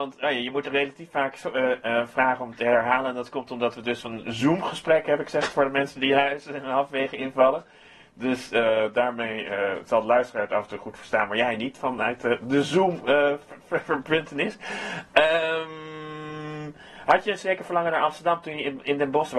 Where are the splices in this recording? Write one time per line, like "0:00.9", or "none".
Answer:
none